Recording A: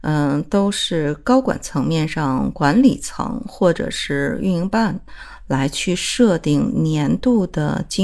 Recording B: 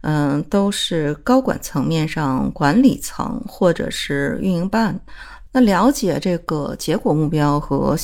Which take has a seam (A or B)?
B